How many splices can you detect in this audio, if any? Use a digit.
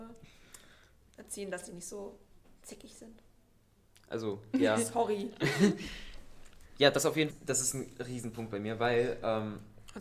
1